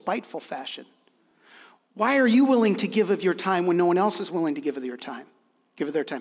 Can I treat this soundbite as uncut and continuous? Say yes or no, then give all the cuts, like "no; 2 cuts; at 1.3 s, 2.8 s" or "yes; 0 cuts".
yes; 0 cuts